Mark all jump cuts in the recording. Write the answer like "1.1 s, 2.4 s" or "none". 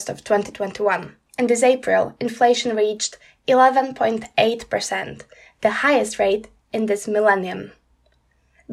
1.3 s